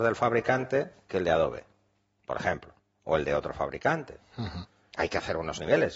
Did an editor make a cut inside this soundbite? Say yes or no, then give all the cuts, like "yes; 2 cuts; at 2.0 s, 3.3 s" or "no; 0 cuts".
yes; 1 cut; at 4.9 s